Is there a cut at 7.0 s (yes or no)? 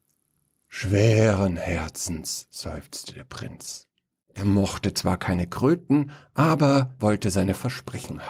yes